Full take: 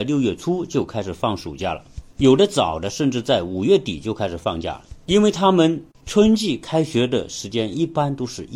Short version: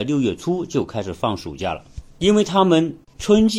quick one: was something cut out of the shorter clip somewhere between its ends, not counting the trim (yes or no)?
yes